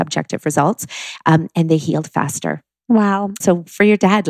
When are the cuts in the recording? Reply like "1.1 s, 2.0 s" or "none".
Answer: 3.4 s

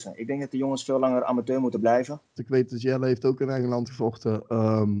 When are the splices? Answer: 2.4 s

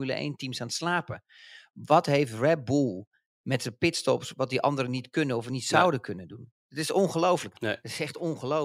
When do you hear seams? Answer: 7.5 s

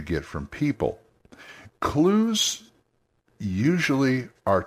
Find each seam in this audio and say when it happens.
1.7 s

